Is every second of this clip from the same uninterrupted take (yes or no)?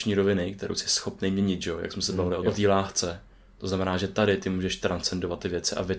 no